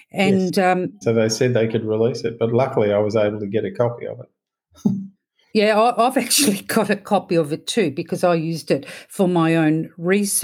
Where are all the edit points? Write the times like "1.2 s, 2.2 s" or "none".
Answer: 1.0 s